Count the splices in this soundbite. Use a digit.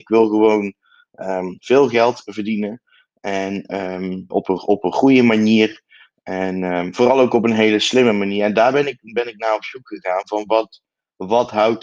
1